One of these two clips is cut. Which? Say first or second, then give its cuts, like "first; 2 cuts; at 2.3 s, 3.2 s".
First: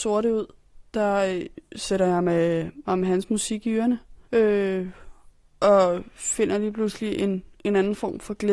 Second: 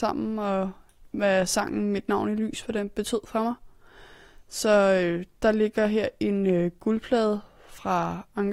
first; 1 cut; at 4.2 s